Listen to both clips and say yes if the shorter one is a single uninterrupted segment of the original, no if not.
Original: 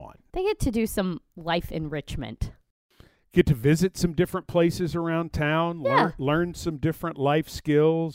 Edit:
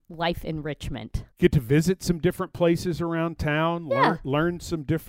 no